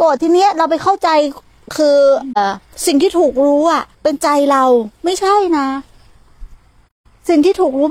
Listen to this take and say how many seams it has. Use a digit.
2